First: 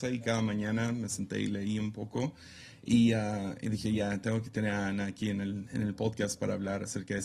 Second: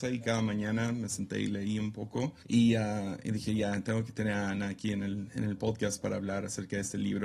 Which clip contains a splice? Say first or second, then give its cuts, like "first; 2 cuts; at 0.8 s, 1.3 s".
second; 1 cut; at 2.4 s